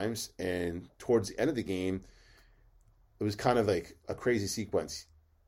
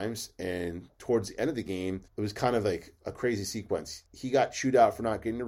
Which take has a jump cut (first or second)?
second